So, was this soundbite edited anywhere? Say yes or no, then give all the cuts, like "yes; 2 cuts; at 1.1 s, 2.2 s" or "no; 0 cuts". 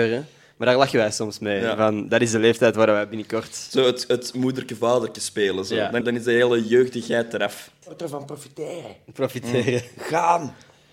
yes; 2 cuts; at 6.0 s, 7.8 s